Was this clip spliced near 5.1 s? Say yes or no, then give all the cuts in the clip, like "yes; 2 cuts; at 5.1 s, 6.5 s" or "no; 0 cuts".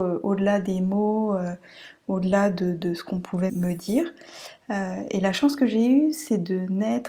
no; 1 cut; at 3.5 s